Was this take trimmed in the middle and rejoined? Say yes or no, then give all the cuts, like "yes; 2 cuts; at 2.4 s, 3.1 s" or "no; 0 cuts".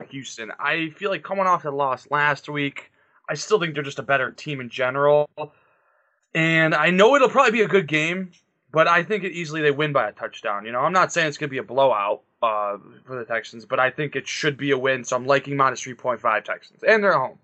no; 0 cuts